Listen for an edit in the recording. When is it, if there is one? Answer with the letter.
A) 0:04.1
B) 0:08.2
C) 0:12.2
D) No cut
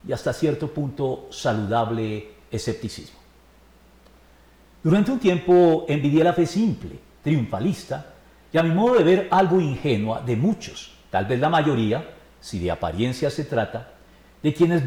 D